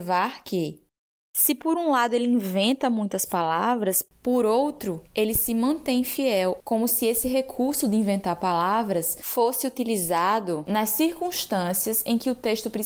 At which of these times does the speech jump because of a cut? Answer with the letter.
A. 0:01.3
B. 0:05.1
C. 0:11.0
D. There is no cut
D